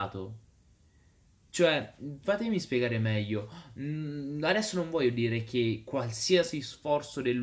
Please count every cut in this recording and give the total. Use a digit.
0